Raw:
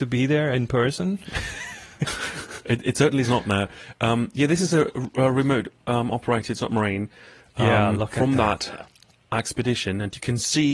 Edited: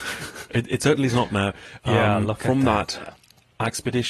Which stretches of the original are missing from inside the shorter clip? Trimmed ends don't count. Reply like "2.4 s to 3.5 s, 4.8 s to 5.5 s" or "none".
3.9 s to 7.5 s